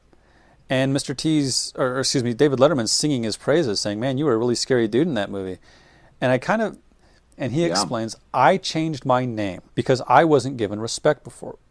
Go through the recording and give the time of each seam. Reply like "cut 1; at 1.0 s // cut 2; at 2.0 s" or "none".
cut 1; at 7.3 s // cut 2; at 9.7 s